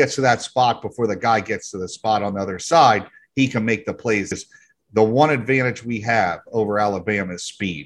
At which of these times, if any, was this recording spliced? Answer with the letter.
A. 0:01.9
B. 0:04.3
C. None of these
B